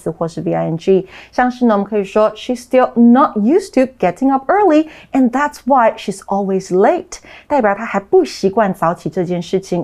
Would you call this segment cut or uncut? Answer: uncut